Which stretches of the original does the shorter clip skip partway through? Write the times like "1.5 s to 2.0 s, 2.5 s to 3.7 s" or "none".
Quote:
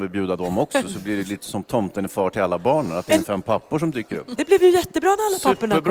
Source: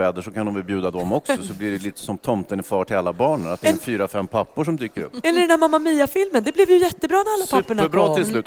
3.8 s to 4.1 s, 5.2 s to 6.4 s